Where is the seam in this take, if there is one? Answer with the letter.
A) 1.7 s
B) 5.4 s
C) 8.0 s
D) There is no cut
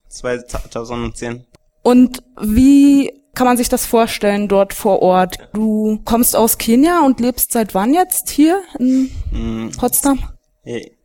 B